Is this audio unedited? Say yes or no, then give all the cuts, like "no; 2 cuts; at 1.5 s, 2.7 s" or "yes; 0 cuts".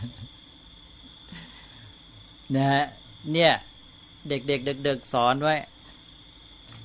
yes; 0 cuts